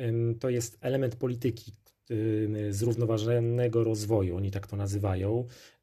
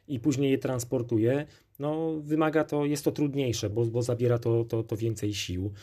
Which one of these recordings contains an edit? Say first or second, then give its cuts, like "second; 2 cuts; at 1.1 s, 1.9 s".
second; 1 cut; at 3.7 s